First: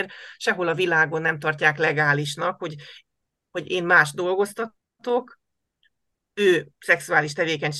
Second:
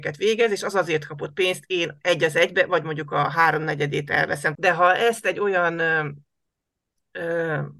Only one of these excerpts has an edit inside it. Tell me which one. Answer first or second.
second